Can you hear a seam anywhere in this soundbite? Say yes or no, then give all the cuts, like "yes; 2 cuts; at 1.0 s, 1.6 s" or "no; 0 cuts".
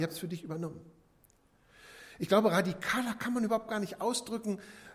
no; 0 cuts